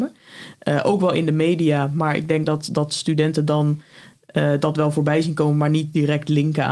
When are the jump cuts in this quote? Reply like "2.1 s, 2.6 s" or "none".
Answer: none